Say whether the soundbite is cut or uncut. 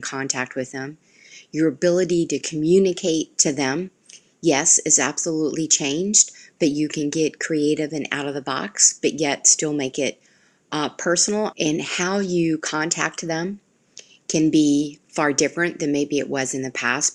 cut